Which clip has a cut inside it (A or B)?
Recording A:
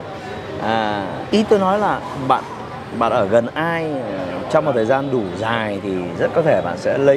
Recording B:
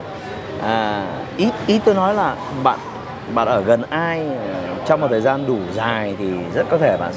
A